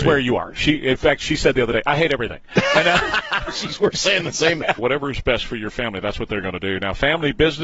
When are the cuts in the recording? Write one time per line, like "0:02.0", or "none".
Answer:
0:04.8

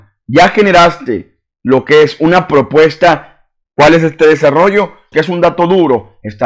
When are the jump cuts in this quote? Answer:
0:03.7
0:05.1

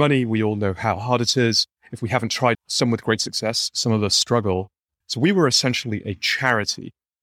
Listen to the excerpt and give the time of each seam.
0:02.5
0:05.0

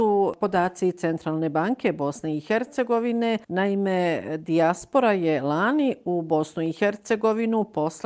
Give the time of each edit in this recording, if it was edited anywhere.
0:03.4

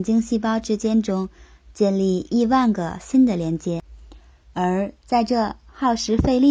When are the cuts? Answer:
0:04.4

